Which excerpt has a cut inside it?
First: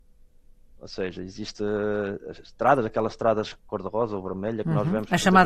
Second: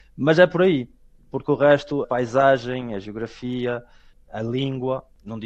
second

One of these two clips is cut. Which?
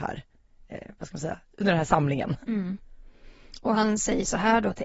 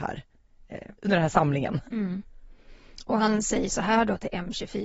second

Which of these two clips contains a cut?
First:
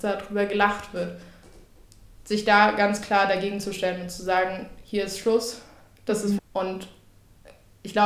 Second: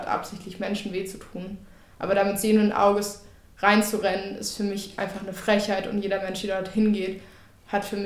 first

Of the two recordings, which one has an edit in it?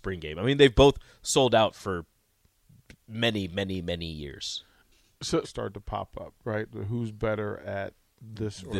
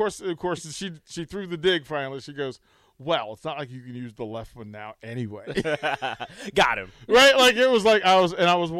first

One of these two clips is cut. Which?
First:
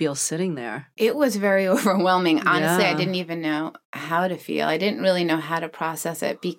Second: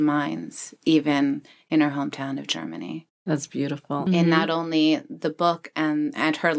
second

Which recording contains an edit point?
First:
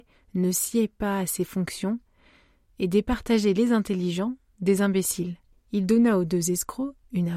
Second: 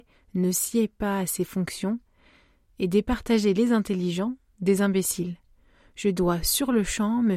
first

